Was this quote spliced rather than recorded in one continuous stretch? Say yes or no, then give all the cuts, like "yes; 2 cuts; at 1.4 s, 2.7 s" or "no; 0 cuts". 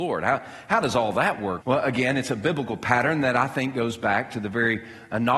yes; 1 cut; at 1.6 s